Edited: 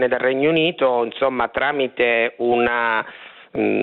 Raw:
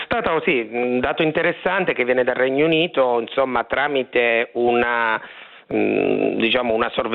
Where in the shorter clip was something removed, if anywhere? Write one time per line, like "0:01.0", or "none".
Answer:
none